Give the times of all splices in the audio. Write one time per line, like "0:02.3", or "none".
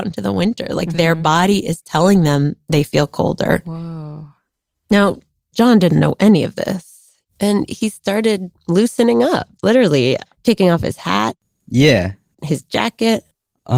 0:05.5
0:07.2